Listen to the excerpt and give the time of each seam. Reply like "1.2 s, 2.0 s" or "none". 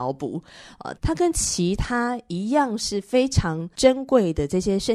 1.0 s